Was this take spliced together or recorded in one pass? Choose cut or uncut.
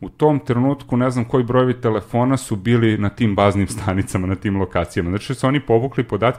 uncut